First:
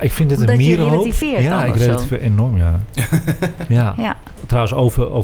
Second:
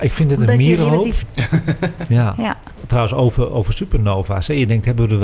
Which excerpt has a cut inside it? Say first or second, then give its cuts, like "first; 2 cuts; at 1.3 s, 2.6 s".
second; 1 cut; at 1.2 s